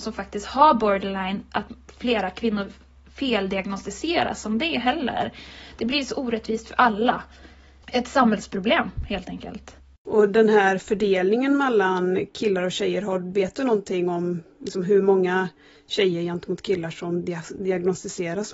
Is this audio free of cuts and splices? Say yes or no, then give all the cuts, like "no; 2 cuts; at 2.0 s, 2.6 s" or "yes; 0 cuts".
yes; 0 cuts